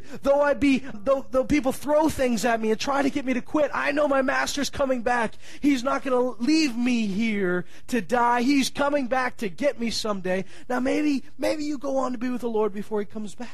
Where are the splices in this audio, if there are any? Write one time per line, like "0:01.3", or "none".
0:00.9